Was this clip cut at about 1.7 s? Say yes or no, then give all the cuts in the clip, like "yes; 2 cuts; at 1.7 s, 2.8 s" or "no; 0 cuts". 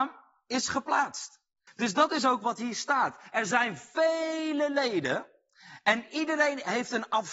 yes; 1 cut; at 1.7 s